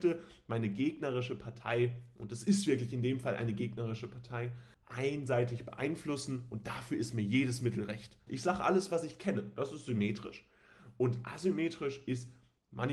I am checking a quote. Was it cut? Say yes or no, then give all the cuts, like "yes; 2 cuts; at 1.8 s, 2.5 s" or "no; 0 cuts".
yes; 2 cuts; at 4.7 s, 8.3 s